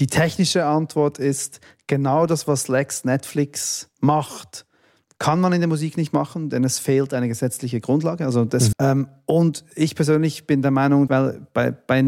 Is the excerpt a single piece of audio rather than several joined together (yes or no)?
no